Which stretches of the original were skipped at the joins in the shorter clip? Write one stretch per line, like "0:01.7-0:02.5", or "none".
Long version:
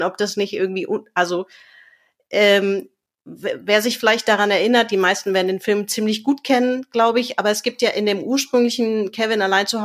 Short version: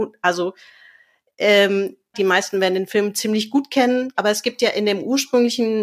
0:03.1-0:04.9
0:06.9-0:07.4